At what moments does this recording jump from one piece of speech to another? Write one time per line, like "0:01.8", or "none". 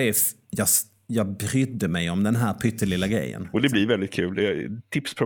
none